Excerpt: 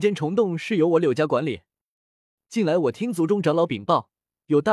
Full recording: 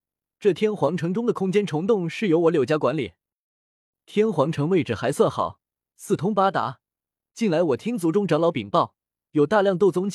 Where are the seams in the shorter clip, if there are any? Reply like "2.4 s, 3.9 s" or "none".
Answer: 2.4 s